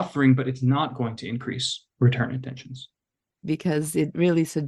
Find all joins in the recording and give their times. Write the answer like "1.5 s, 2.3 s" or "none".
3.4 s